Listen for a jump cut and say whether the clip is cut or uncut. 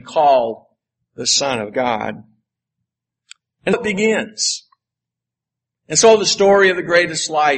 cut